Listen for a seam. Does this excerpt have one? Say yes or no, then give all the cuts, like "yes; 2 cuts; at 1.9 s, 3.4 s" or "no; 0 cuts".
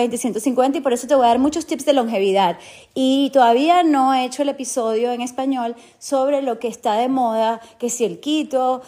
no; 0 cuts